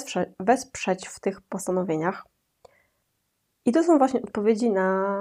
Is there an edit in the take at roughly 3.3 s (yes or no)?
no